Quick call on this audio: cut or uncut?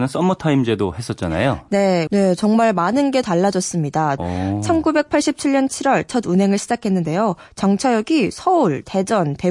cut